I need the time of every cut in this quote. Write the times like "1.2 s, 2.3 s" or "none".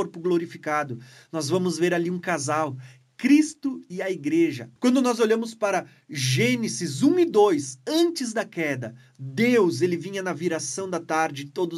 4.8 s

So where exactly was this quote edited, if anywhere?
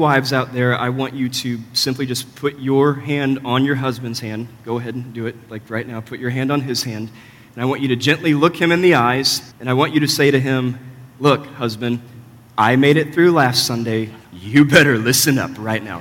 9.5 s, 14.2 s

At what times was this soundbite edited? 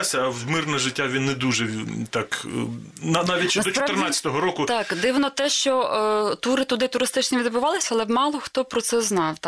none

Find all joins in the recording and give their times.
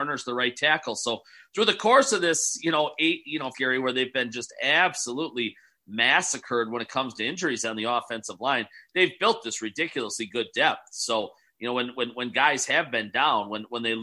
3.5 s

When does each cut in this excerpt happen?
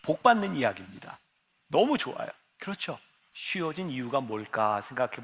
3.3 s

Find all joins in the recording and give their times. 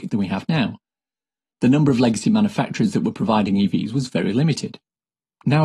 none

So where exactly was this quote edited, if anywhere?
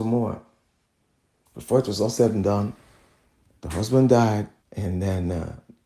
1.5 s, 4.6 s

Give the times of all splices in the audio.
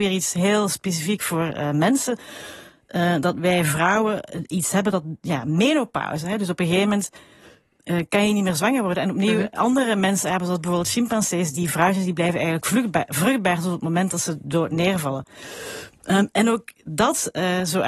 none

